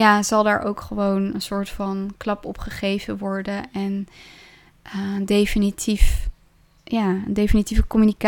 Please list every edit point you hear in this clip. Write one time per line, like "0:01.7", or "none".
none

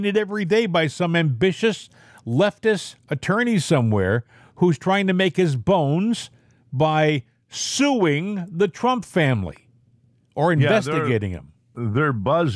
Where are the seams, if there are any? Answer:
none

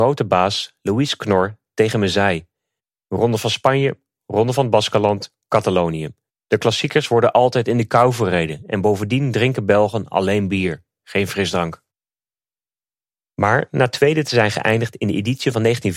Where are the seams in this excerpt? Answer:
0:06.3

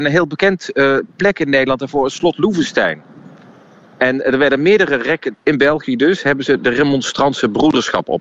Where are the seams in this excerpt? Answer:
0:05.3

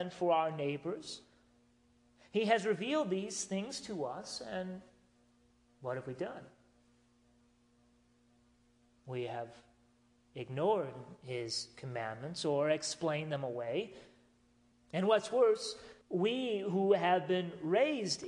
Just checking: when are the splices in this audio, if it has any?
0:14.7
0:16.0

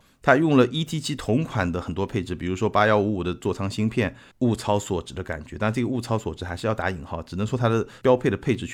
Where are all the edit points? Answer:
0:04.3

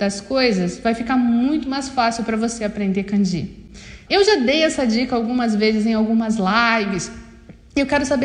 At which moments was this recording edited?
0:04.1

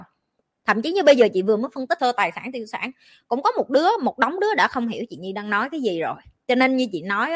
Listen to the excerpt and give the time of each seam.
0:02.0

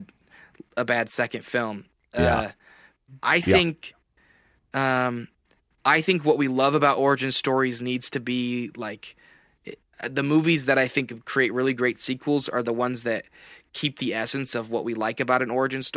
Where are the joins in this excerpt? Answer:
0:03.2

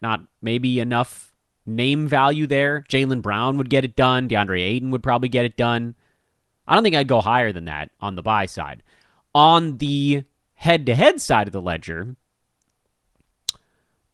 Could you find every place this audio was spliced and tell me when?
none

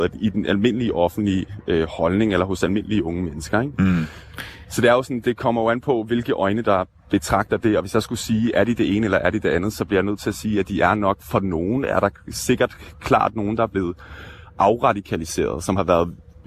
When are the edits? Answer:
none

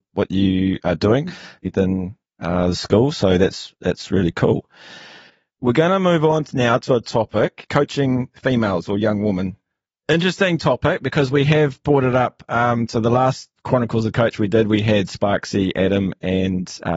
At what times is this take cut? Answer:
none

